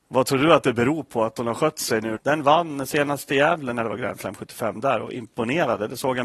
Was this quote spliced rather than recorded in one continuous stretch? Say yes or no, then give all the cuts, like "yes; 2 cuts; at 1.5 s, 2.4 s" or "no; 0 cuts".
yes; 1 cut; at 2.2 s